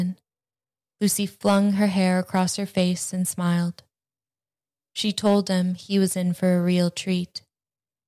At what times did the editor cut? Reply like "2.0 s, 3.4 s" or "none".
none